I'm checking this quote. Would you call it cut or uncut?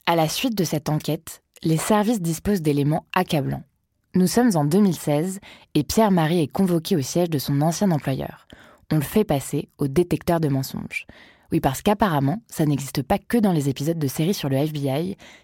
uncut